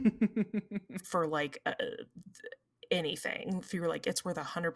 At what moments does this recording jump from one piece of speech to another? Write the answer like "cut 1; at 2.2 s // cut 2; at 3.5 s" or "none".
none